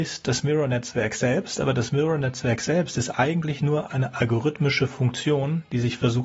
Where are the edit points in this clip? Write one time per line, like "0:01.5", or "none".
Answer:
none